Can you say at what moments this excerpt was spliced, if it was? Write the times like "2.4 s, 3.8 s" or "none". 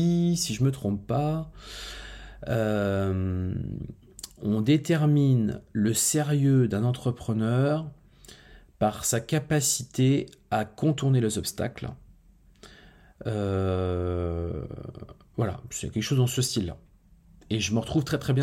none